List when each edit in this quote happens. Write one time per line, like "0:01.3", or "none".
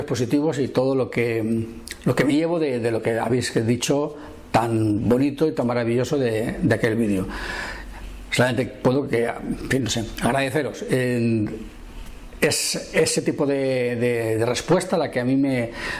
none